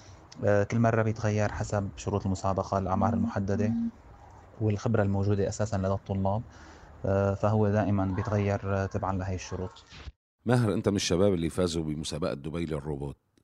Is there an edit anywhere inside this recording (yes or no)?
no